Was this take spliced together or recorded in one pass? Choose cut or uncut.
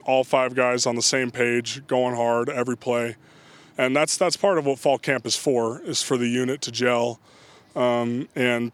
uncut